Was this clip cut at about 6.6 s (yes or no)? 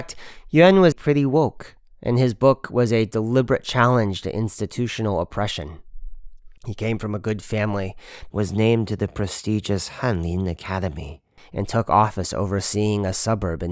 yes